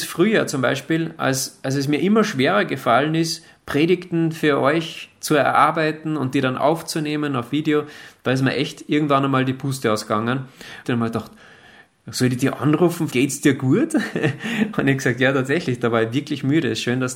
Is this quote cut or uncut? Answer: cut